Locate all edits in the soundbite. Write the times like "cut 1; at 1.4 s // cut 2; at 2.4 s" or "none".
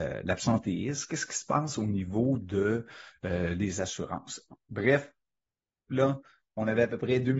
cut 1; at 5.9 s